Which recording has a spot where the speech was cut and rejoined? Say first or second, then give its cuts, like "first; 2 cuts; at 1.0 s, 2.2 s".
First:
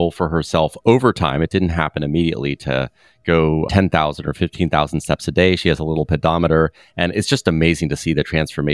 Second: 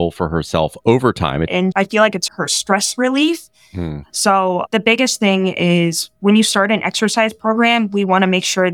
second; 2 cuts; at 1.5 s, 4.0 s